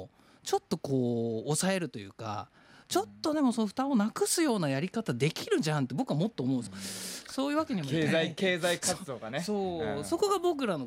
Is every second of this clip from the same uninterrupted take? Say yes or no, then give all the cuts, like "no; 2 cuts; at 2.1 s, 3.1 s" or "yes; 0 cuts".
no; 1 cut; at 6.7 s